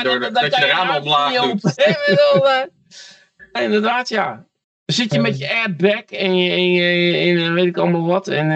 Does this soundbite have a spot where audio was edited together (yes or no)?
yes